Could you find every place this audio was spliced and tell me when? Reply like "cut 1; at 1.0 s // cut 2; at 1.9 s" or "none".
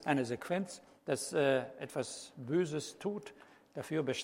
cut 1; at 1.0 s